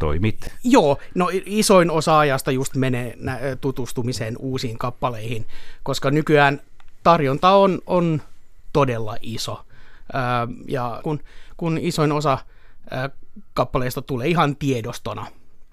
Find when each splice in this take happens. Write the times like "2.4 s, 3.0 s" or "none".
11.0 s